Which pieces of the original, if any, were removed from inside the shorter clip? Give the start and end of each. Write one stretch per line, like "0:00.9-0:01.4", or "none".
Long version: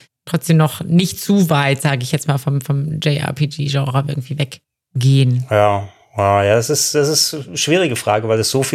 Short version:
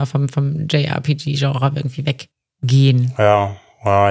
none